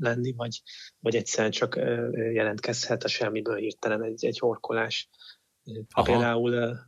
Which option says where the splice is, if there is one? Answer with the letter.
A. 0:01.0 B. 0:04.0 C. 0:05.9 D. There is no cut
C